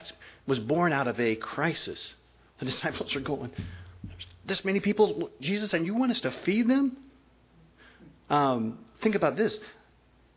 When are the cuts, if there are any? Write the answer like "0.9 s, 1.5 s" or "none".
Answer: 8.3 s